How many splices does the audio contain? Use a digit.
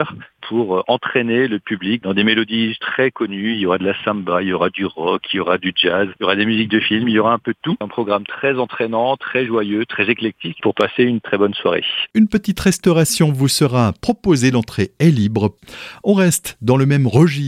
1